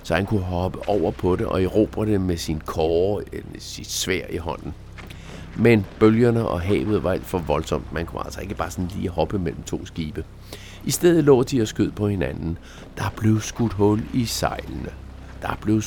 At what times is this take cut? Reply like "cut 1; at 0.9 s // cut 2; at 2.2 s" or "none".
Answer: none